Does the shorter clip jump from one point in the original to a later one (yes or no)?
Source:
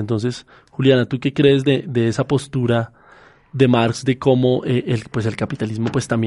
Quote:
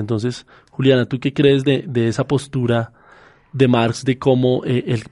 no